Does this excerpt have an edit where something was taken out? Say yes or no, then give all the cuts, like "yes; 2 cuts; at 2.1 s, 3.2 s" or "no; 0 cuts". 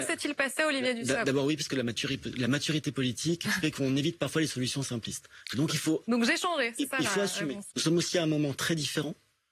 yes; 1 cut; at 7.7 s